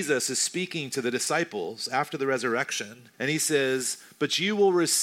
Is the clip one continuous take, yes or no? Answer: no